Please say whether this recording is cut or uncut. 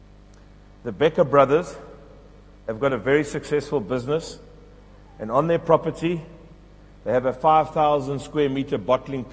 uncut